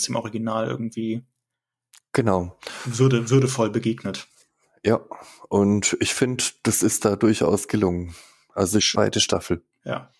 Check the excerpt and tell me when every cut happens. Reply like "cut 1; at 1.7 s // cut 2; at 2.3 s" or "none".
cut 1; at 8.9 s

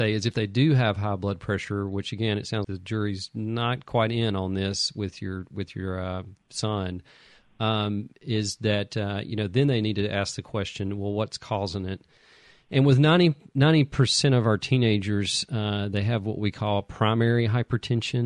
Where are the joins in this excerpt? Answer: cut 1; at 2.6 s

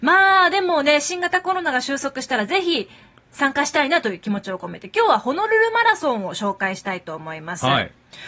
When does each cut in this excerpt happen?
none

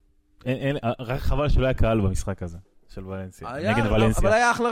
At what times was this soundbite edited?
none

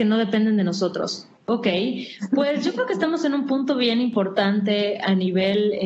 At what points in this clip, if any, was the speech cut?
cut 1; at 1.4 s

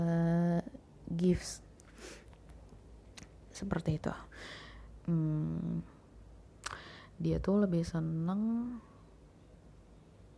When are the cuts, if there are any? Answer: cut 1; at 5.0 s

